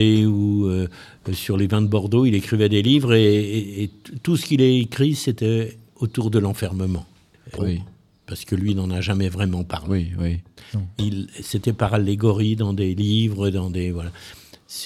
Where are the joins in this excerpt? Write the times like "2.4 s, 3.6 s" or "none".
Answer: 7.6 s